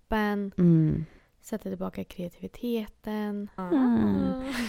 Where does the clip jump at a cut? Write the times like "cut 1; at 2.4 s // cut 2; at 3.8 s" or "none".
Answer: cut 1; at 3.6 s